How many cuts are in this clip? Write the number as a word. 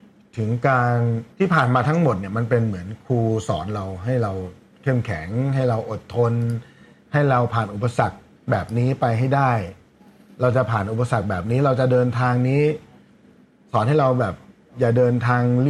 one